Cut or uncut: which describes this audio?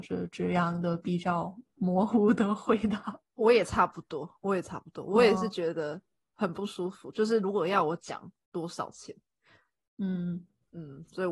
uncut